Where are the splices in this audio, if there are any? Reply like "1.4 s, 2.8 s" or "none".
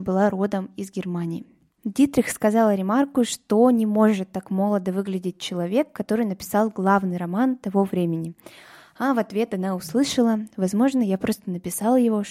1.7 s